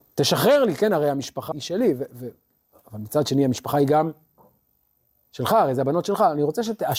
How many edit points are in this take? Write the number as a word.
one